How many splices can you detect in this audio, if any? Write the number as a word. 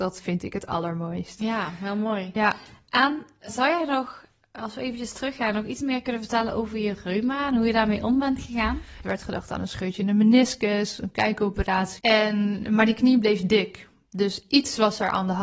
three